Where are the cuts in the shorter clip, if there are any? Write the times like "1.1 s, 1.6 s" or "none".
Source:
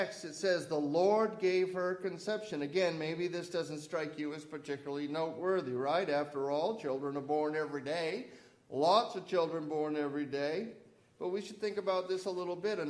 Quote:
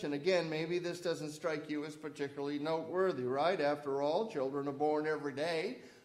none